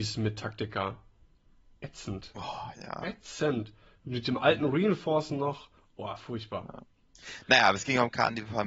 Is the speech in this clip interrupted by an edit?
no; 0 cuts

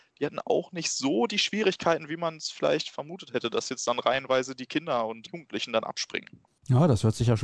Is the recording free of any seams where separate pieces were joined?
no; 1 cut; at 6.5 s

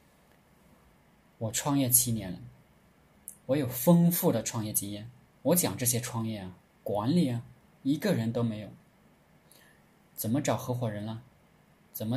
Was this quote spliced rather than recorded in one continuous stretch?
no; 0 cuts

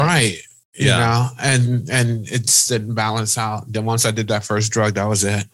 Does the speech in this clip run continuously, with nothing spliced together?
no; 1 cut; at 2.7 s

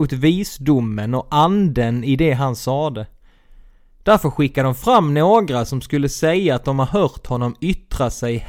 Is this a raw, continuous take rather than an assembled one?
yes; 0 cuts

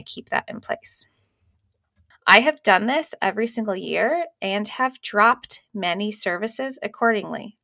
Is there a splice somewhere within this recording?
yes; 1 cut; at 2.1 s

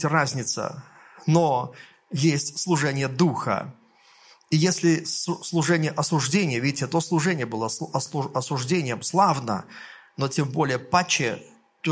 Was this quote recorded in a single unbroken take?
yes; 0 cuts

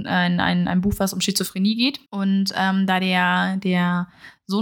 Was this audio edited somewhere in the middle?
yes; 1 cut; at 2.0 s

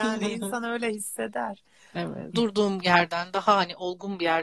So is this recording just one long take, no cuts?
no; 1 cut; at 2.3 s

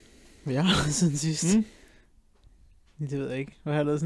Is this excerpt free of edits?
yes; 0 cuts

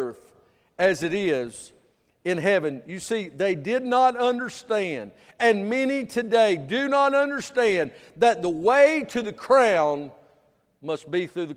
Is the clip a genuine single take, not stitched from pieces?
yes; 0 cuts

